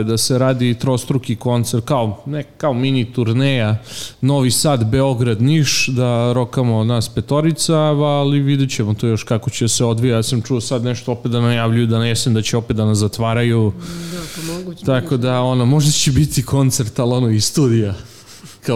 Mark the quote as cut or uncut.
uncut